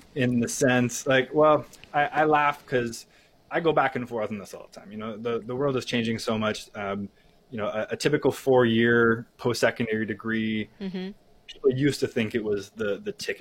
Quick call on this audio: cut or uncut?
uncut